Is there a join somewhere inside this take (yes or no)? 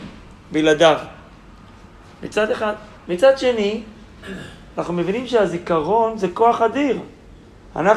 no